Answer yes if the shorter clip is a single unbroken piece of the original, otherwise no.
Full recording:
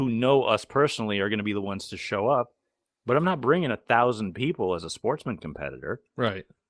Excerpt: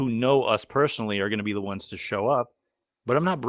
yes